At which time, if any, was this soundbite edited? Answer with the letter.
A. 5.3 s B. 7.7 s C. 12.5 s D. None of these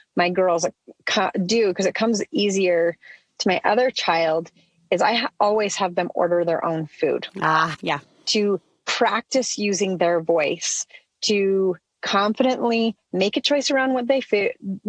B